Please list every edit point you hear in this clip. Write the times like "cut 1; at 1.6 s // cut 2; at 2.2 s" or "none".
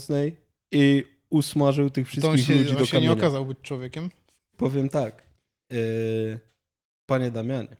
cut 1; at 4.5 s